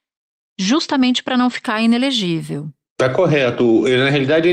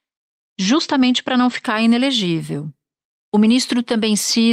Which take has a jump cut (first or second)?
first